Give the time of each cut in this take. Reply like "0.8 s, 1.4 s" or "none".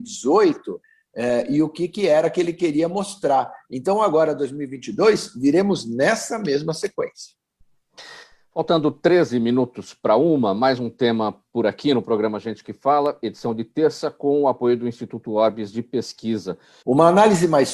16.8 s